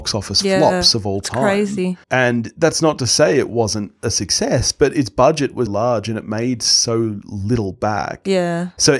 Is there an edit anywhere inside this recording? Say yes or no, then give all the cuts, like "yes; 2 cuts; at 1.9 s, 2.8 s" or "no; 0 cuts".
yes; 2 cuts; at 2.0 s, 5.7 s